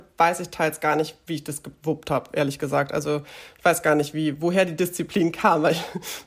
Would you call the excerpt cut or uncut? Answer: uncut